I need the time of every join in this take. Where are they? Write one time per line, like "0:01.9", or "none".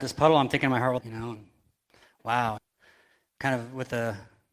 0:01.0
0:02.6

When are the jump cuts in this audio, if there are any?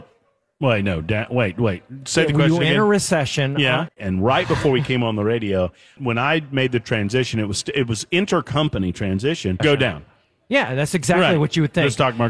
0:03.9
0:06.0
0:09.6

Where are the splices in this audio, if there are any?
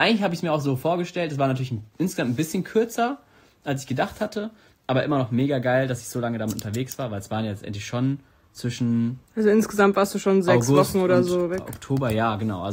none

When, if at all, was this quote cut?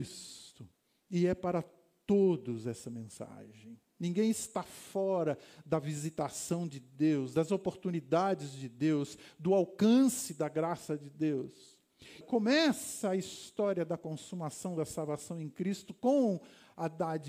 0:12.2

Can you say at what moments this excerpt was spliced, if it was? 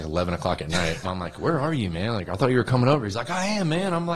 0:01.0

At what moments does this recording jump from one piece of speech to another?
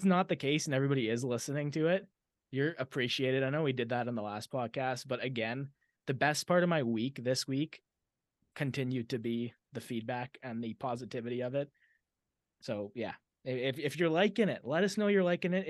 none

